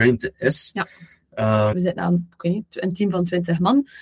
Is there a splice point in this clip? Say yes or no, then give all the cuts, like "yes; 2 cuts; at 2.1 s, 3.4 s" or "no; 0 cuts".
yes; 1 cut; at 1.7 s